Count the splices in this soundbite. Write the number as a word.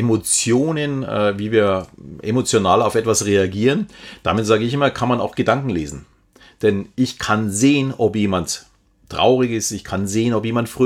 zero